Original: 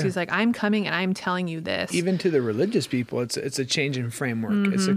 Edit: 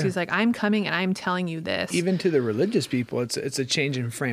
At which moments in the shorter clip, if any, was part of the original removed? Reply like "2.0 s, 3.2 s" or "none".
none